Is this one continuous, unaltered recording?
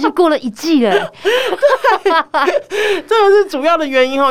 yes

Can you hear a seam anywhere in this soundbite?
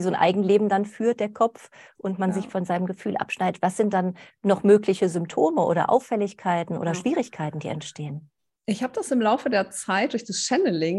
no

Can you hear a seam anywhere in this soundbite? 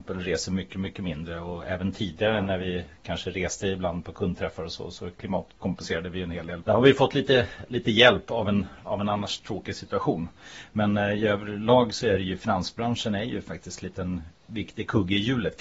yes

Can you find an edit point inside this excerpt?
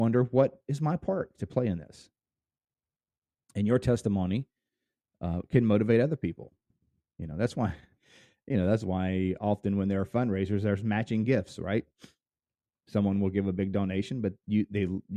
no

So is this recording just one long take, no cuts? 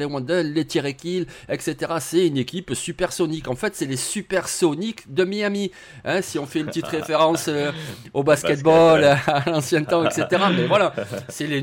yes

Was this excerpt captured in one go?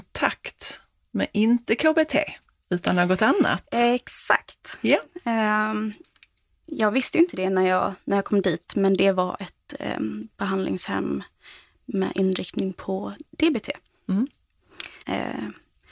no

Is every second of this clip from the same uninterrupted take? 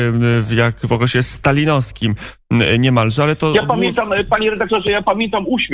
yes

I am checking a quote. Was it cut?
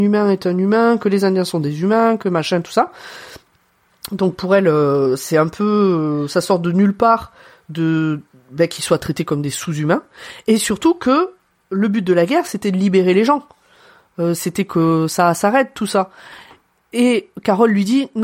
no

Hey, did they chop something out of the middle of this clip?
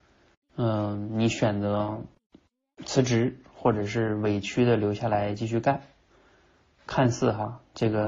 no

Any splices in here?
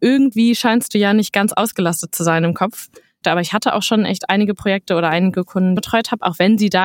yes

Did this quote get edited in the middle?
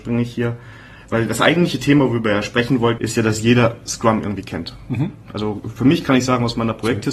yes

